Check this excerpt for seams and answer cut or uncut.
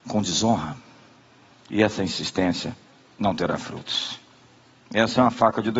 uncut